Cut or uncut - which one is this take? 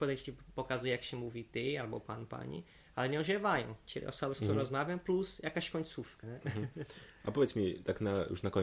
cut